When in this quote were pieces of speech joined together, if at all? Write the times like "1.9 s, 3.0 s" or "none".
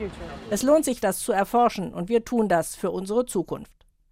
1.0 s